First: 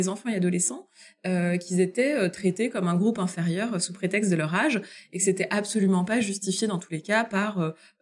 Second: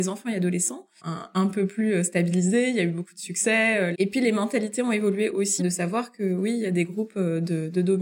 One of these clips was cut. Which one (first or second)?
second